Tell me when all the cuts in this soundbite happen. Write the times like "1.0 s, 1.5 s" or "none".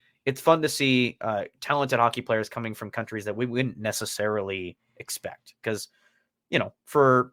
none